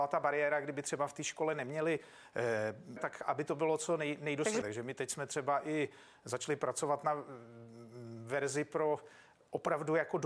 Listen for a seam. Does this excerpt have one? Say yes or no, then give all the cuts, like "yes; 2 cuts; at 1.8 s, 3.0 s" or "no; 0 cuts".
yes; 2 cuts; at 3.0 s, 4.6 s